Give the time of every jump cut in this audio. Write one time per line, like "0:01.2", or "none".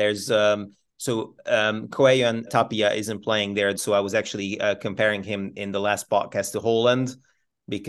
0:02.5
0:03.8